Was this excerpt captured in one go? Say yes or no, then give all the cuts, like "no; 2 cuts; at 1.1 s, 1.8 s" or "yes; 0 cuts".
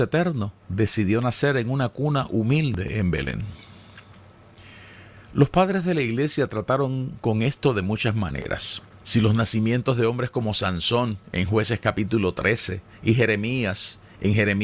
no; 1 cut; at 9.0 s